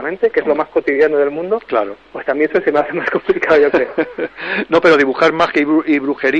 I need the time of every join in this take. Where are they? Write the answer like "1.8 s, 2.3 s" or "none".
none

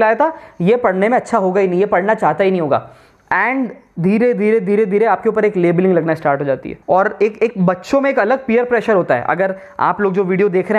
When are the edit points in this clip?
6.8 s

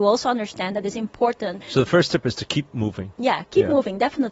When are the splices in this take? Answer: 1.6 s

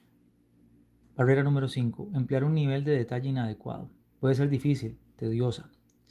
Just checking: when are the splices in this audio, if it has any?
4.0 s

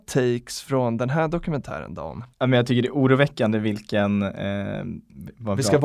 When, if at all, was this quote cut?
2.3 s

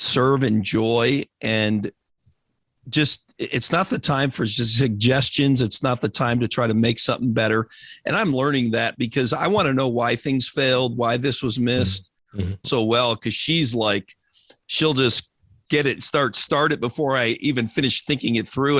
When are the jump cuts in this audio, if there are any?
12.6 s

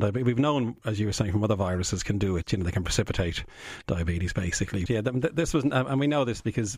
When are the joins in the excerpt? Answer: 4.9 s

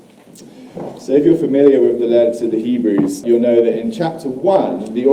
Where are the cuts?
3.2 s

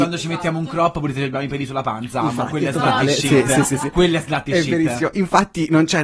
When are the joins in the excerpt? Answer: none

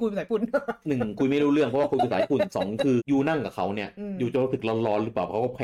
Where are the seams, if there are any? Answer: 3.0 s

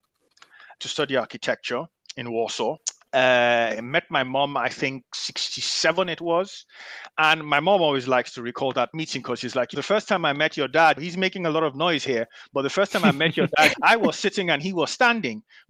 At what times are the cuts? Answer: none

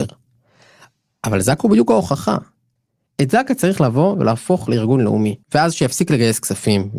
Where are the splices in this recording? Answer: 5.4 s

